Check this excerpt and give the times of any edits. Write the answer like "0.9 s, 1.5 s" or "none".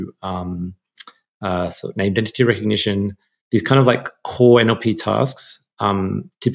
none